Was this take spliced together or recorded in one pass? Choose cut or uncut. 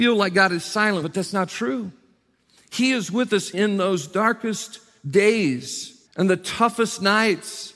cut